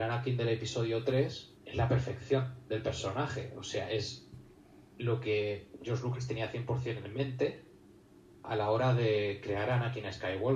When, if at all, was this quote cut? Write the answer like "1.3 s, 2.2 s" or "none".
1.6 s